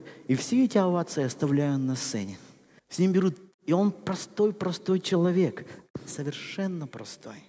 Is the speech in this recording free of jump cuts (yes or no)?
no